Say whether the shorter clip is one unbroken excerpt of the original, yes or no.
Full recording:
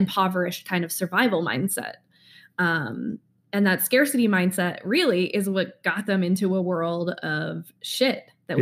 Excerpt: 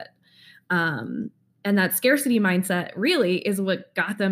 yes